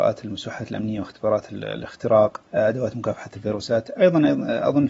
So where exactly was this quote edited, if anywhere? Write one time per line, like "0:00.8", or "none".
0:02.5